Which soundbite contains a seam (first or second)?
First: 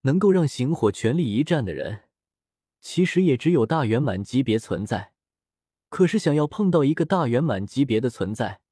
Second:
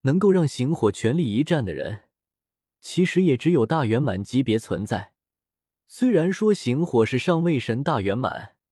second